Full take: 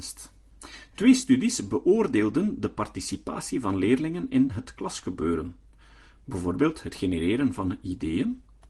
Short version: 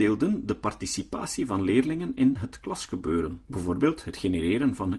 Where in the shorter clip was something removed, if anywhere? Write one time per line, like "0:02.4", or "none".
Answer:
0:03.5